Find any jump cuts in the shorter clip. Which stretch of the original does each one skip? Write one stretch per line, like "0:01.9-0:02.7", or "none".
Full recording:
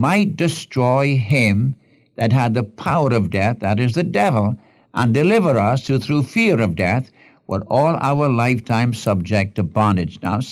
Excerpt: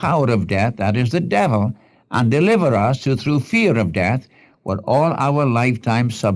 none